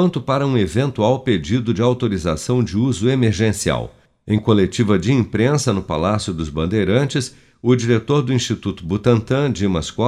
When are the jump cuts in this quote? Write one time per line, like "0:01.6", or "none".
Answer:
none